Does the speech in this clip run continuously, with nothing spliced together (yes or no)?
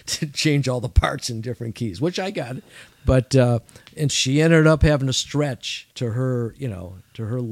no